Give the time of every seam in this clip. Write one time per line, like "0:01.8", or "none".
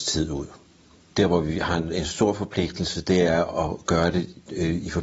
0:01.1

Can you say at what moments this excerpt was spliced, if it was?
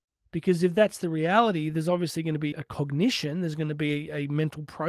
0:02.5

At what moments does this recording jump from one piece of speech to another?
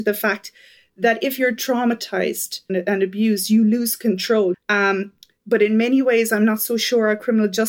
0:02.7
0:04.5

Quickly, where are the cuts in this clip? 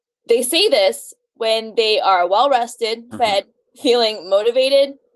0:03.1

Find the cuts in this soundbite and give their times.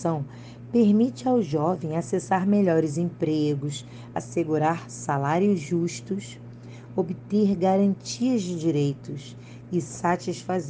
0:04.1

